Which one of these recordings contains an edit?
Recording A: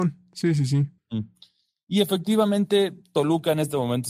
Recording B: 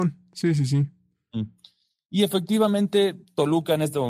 A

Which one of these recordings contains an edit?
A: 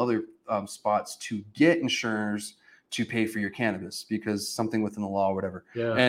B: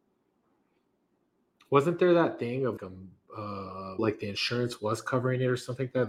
B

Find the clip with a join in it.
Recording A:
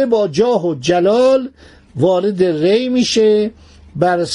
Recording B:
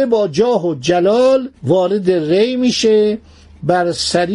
B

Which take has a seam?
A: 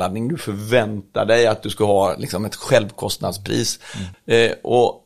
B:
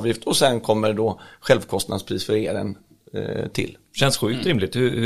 A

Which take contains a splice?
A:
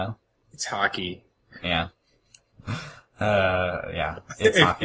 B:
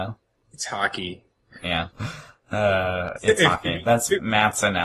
B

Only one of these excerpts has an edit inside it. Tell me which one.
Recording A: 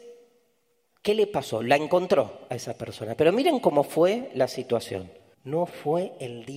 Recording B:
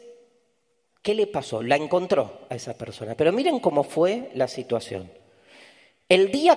A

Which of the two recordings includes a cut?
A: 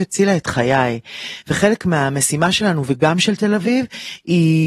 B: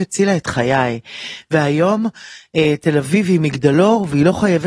A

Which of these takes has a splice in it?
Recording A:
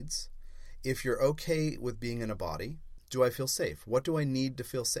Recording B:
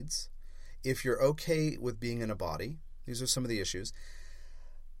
A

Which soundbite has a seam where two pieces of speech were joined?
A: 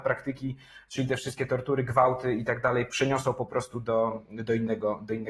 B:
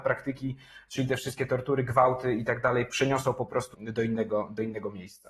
B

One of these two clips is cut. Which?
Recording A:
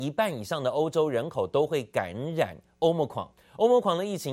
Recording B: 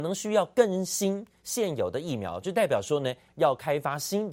B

